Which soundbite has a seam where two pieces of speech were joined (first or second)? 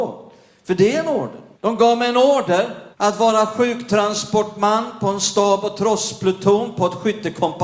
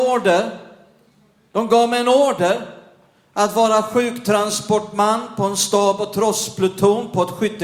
first